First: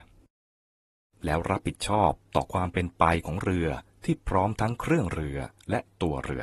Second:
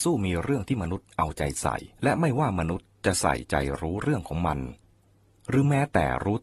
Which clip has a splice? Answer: second; 1 cut; at 1.9 s

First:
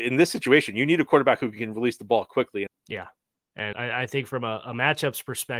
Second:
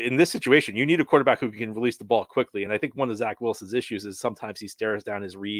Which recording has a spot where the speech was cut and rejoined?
first; 2 cuts; at 2.7 s, 3.7 s

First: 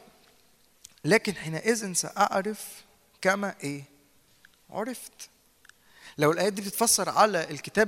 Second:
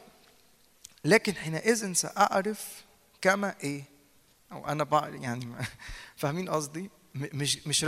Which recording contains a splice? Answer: second; 1 cut; at 4.3 s

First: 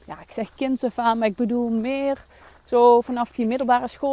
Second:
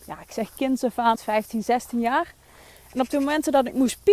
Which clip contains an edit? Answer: second; 1 cut; at 1.1 s

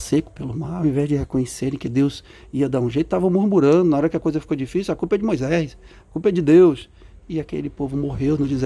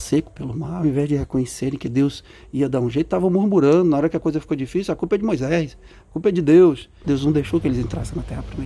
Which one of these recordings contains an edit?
second; 1 cut; at 7.0 s

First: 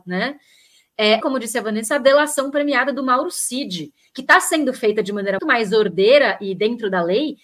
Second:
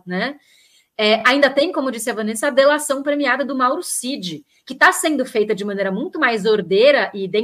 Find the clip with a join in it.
first; 2 cuts; at 1.2 s, 5.4 s

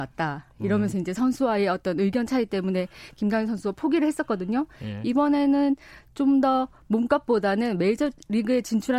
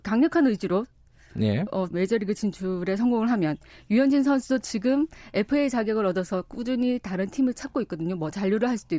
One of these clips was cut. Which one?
second; 1 cut; at 1.9 s

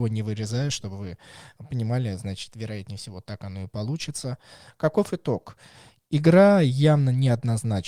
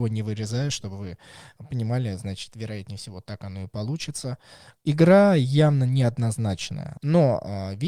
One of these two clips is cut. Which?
second; 2 cuts; at 4.8 s, 7.0 s

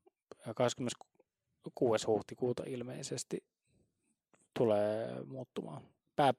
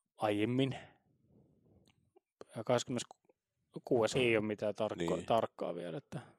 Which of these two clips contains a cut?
second; 1 cut; at 4.2 s

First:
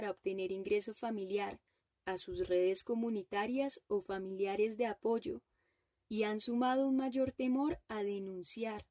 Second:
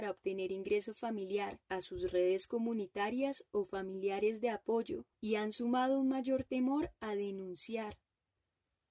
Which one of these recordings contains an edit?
second; 2 cuts; at 1.6 s, 5.1 s

